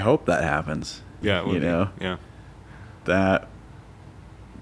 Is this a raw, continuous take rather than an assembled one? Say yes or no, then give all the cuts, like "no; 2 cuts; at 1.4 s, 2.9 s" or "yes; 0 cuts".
no; 1 cut; at 1.2 s